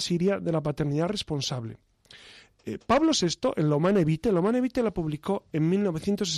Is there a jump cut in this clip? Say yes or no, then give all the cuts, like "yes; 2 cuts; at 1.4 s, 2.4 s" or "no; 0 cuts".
no; 0 cuts